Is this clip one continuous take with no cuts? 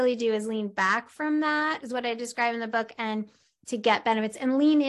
yes; 0 cuts

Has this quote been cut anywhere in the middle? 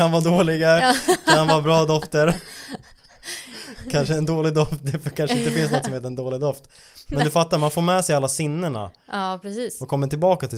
no; 0 cuts

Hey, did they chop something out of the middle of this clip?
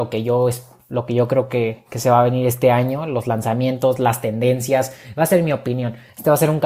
no; 0 cuts

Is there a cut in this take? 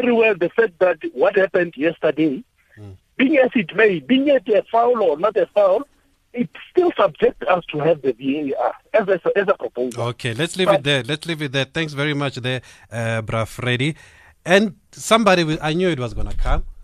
no; 0 cuts

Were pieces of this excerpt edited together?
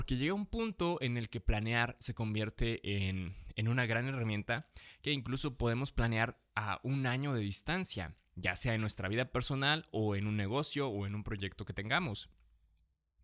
no; 0 cuts

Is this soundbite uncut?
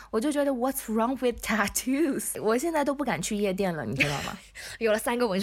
yes; 0 cuts

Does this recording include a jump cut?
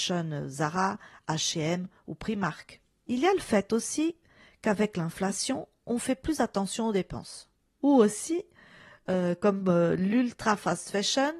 yes; 2 cuts; at 3.0 s, 7.8 s

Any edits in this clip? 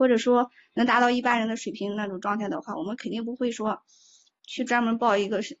no; 0 cuts

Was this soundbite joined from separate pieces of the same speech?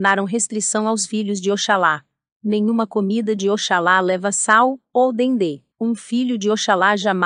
yes; 1 cut; at 5.7 s

